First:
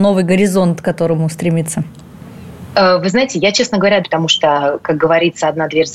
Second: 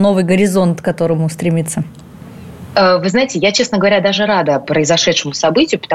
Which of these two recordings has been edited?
first; 1 cut; at 4.0 s

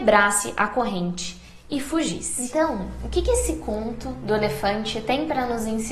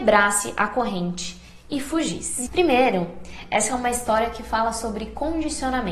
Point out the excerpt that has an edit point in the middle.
second; 1 cut; at 2.5 s

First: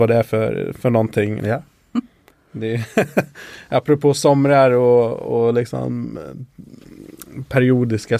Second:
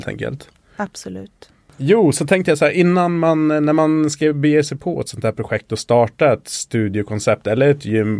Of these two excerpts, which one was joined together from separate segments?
first; 1 cut; at 1.4 s

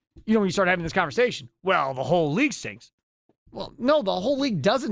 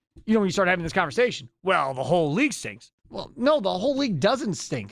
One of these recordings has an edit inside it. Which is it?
second; 1 cut; at 3.0 s

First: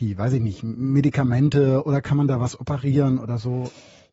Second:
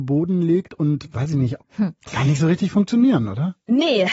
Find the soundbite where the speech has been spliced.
second; 1 cut; at 1.6 s

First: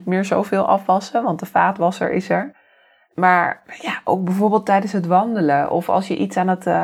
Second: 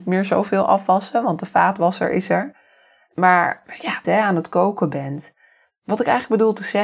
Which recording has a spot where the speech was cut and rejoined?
second; 1 cut; at 4.0 s

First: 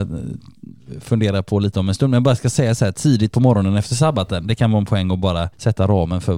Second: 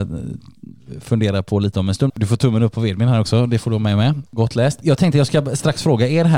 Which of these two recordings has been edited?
second; 1 cut; at 2.1 s

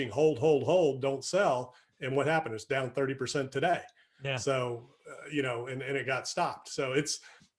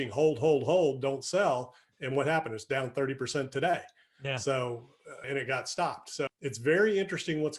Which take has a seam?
second; 2 cuts; at 5.2 s, 6.3 s

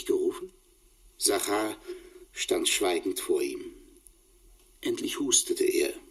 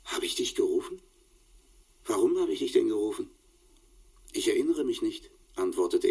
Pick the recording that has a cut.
first; 1 cut; at 1.1 s

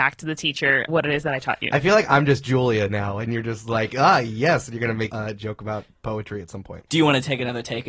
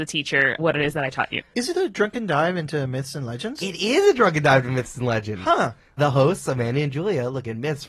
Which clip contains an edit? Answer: second; 1 cut; at 1.4 s

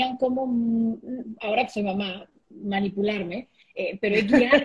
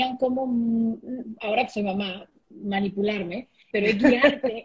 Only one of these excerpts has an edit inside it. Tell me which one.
second; 1 cut; at 3.7 s

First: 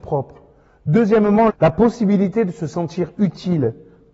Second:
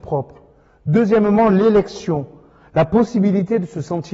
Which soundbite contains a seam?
first; 1 cut; at 1.5 s

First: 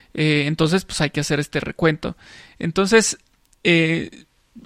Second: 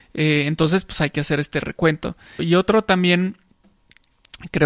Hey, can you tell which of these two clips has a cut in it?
second; 1 cut; at 2.4 s

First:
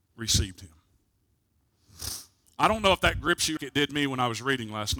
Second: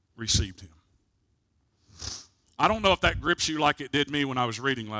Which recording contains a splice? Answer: first; 1 cut; at 3.6 s

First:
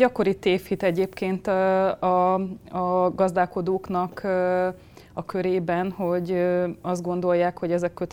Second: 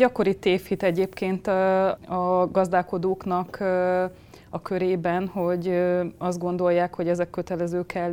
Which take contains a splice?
second; 1 cut; at 2.0 s

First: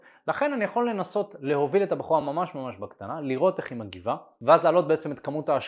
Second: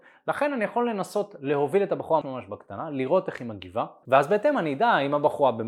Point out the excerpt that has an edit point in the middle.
second; 2 cuts; at 2.2 s, 4.0 s

